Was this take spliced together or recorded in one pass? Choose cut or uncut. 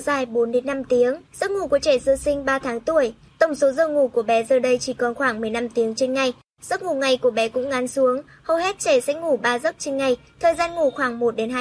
cut